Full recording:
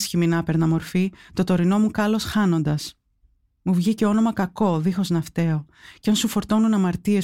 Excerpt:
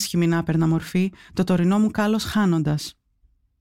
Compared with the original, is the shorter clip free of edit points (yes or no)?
yes